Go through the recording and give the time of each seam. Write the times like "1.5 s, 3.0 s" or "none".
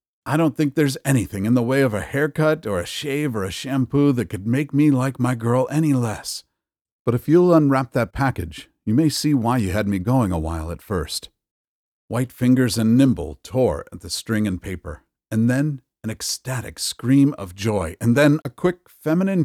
18.4 s